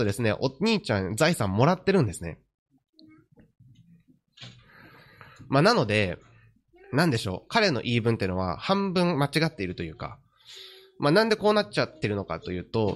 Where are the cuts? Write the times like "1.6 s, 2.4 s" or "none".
none